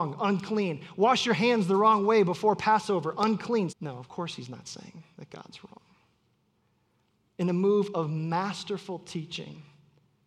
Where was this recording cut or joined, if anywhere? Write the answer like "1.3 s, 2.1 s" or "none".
3.7 s